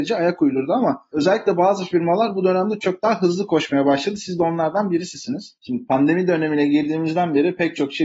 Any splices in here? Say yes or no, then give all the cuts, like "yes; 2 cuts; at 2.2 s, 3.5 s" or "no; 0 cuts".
yes; 2 cuts; at 2.8 s, 5.6 s